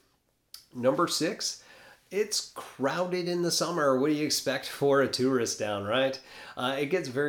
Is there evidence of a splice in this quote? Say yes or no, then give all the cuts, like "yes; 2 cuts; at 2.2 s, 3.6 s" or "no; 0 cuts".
no; 0 cuts